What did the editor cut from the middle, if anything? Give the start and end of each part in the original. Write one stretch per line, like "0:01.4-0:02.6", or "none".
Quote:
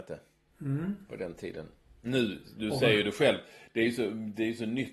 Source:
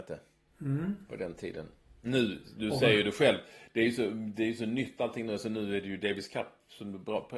none